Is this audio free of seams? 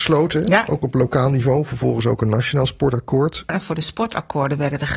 no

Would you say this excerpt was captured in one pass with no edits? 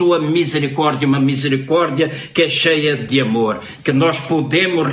yes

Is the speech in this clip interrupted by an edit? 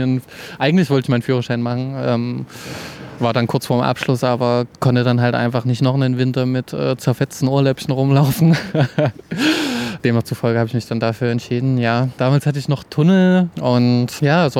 yes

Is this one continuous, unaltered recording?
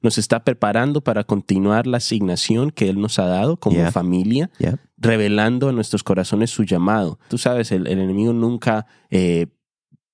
no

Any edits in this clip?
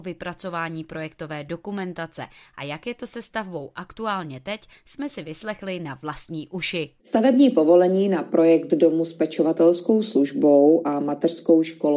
yes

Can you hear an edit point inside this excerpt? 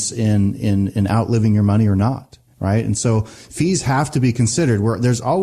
no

